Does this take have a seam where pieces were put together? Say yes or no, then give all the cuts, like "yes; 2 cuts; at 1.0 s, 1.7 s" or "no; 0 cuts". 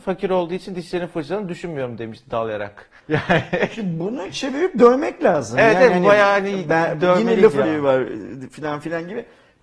yes; 2 cuts; at 3.0 s, 7.6 s